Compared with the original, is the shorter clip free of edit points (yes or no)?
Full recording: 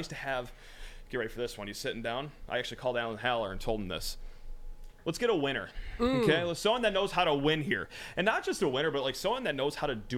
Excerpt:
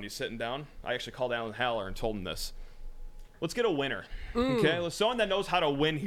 yes